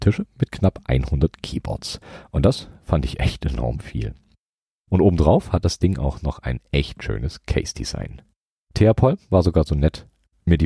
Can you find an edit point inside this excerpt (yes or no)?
yes